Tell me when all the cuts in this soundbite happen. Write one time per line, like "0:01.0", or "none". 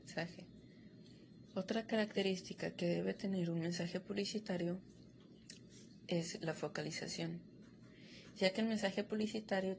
0:01.5